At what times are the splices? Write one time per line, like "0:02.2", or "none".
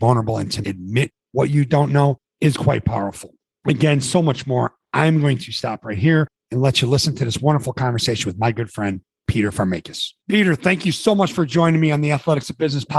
0:10.2